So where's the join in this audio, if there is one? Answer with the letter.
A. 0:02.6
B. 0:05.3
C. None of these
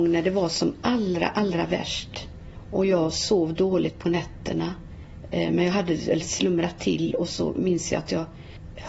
C